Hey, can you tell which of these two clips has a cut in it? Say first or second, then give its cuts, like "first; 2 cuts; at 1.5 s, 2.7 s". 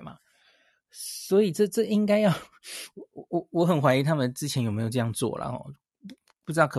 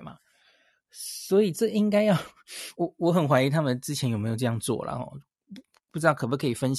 second; 2 cuts; at 1.5 s, 2.7 s